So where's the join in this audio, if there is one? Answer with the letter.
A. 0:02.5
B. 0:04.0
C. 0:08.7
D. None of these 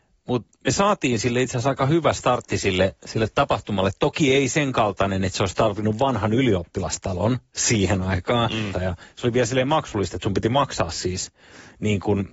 C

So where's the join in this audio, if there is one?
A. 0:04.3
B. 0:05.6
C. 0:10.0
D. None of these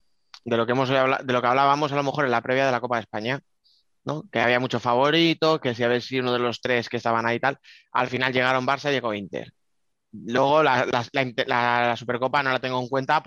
D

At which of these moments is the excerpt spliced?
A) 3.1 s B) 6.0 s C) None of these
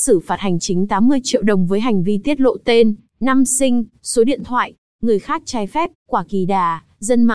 B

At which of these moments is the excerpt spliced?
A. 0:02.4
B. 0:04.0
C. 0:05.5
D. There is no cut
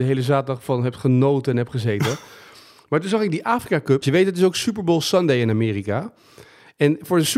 B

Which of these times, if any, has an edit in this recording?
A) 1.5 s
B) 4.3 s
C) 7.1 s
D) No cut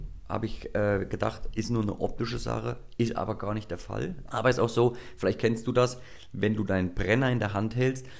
B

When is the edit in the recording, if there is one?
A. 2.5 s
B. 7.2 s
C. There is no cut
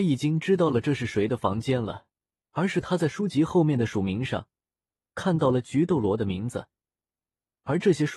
A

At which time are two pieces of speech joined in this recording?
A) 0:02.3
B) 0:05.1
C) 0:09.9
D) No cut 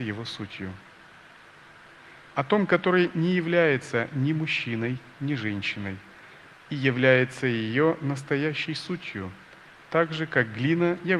A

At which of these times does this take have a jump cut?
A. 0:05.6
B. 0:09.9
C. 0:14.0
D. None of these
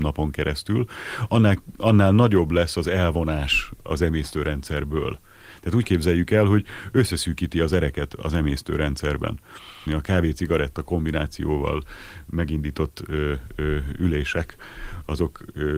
B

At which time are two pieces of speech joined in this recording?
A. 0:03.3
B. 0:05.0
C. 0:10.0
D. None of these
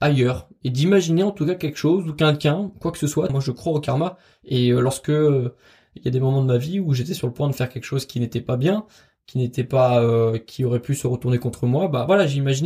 A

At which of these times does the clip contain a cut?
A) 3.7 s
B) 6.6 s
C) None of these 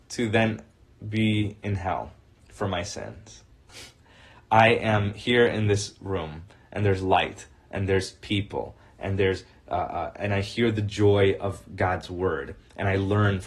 A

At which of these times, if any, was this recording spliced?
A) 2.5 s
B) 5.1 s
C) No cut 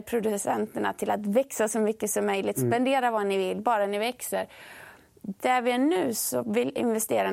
C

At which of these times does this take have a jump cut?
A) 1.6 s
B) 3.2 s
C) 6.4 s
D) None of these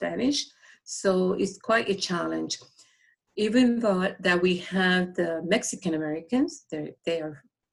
D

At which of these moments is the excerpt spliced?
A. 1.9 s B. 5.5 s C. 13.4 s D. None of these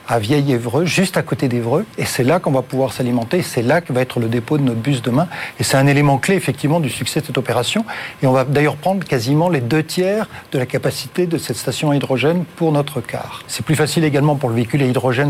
C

